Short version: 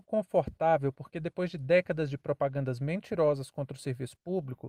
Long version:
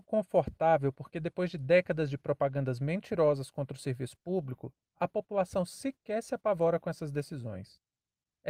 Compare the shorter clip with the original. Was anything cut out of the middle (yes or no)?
no